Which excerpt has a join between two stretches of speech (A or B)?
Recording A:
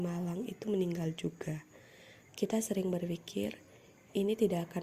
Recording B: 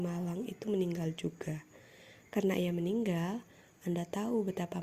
A